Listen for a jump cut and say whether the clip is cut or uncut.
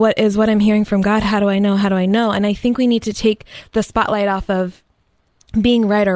uncut